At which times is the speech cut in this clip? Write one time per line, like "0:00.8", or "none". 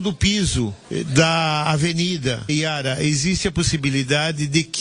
0:02.5